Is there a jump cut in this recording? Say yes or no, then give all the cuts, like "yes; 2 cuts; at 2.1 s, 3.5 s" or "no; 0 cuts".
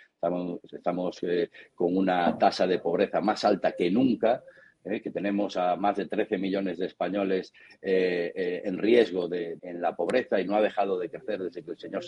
yes; 1 cut; at 9.6 s